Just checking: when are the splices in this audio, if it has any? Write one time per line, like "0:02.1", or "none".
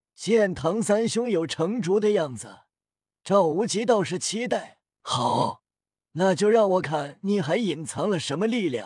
0:06.8

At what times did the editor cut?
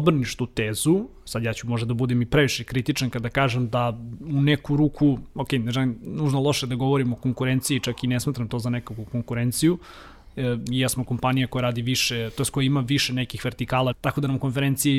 0:10.7
0:13.9

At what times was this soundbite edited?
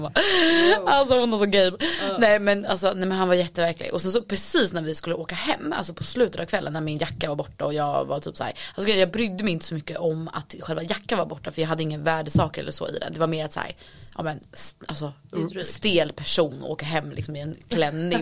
none

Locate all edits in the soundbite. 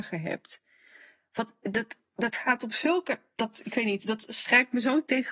none

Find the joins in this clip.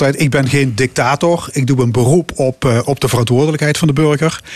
none

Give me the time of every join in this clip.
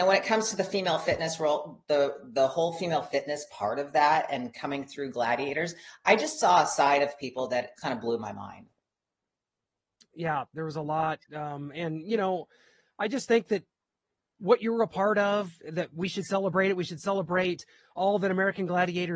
0:07.8

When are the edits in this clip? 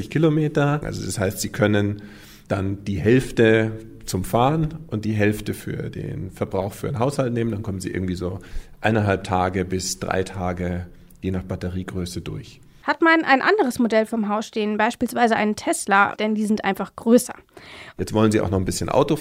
0:16.1
0:18.0

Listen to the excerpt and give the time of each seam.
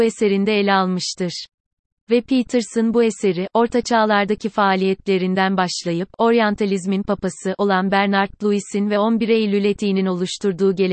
0:02.0

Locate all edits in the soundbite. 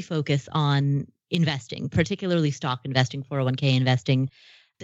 none

